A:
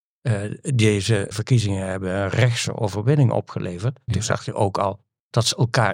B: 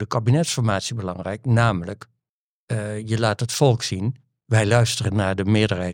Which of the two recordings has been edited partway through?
A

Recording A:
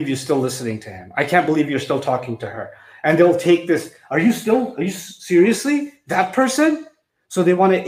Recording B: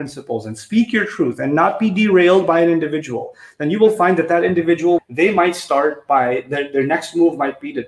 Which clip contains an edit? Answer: B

